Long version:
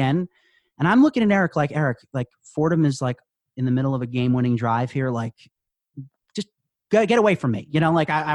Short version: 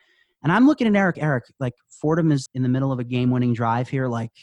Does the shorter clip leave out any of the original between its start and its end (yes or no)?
yes